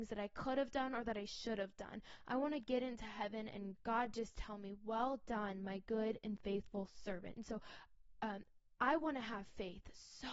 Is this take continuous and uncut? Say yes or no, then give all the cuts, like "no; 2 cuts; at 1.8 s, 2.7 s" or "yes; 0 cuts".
no; 1 cut; at 3.8 s